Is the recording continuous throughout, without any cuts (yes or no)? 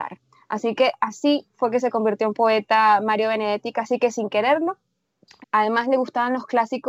no